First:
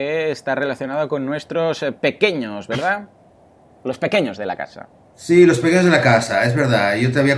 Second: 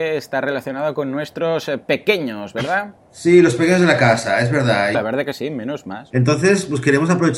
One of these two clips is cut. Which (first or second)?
second